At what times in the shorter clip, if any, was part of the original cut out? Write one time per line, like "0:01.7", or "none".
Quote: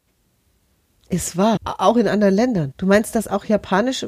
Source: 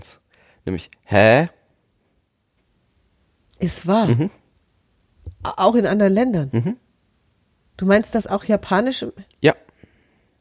0:01.6
0:02.7